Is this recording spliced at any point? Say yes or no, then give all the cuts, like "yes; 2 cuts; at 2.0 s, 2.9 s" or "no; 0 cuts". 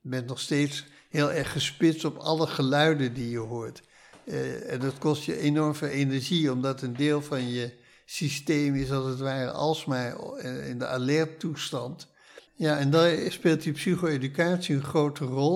yes; 1 cut; at 12.5 s